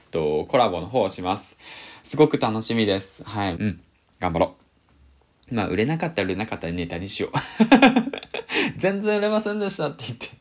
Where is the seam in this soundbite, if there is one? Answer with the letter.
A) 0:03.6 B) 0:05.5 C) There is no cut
A